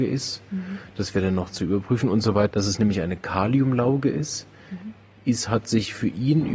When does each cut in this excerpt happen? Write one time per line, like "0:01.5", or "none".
0:02.5